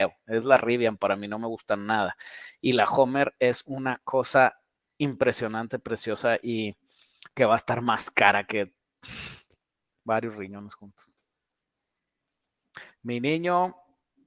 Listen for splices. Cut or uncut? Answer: uncut